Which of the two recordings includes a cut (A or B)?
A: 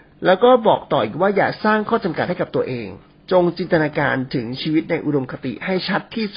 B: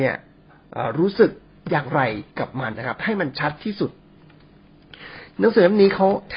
B